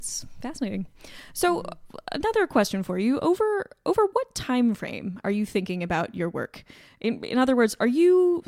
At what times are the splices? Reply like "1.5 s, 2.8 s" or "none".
none